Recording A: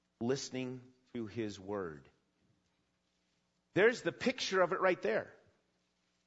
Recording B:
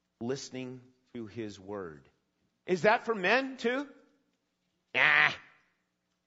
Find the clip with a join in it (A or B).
B